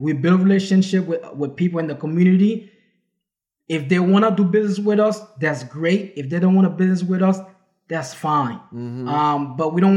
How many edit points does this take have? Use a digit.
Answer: 0